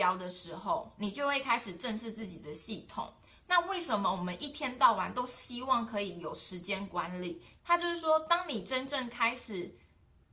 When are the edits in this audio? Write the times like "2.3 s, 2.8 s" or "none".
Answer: 7.6 s

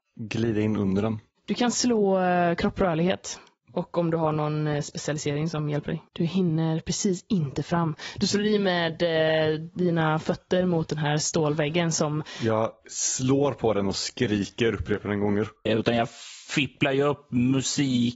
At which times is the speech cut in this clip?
6.1 s, 15.7 s

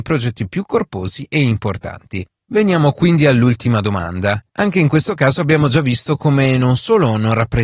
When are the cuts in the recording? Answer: 4.5 s

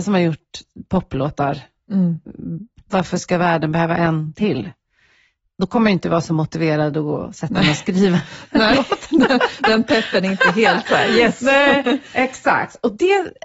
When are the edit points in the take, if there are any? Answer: none

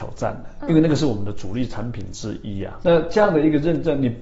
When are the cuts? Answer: 2.8 s

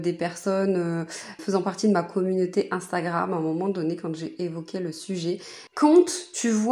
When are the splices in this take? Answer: 1.4 s, 5.7 s

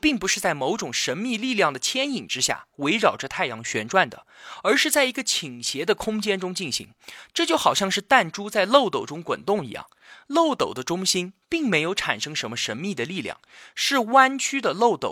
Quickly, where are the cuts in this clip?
none

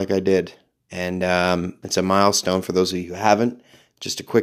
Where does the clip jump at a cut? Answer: 1.8 s

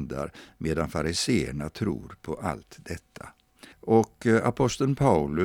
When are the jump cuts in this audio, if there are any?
3.7 s

